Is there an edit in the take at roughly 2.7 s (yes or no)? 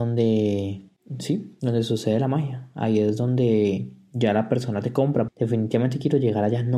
no